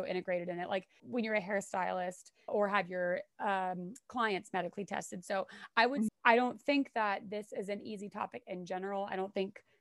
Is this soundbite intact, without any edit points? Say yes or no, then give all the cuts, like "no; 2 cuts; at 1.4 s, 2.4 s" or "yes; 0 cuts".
no; 3 cuts; at 1.0 s, 2.5 s, 6.1 s